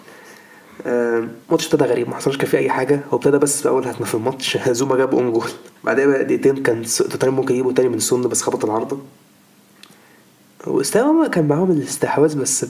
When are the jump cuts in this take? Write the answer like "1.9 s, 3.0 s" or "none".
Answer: 1.4 s, 5.8 s